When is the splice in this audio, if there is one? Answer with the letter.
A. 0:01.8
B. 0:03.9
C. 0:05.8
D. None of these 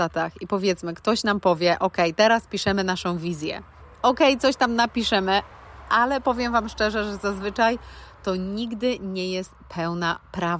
D